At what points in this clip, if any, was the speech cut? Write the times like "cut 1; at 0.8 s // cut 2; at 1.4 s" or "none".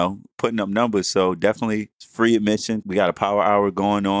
cut 1; at 2.8 s